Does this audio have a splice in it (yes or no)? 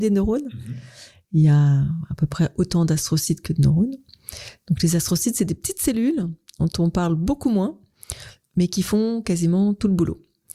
no